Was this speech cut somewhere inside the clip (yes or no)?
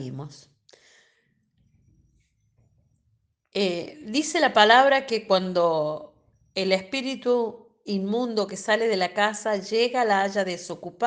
no